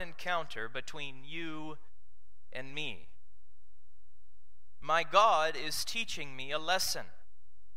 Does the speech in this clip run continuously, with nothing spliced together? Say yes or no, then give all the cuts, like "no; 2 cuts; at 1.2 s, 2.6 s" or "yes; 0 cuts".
no; 1 cut; at 4.8 s